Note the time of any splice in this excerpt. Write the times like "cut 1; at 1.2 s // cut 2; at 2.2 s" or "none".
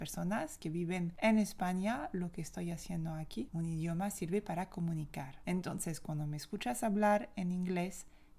cut 1; at 3.5 s // cut 2; at 5.5 s